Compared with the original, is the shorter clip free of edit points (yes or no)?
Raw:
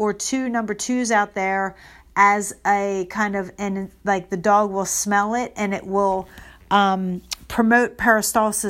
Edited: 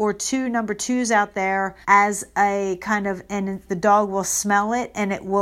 no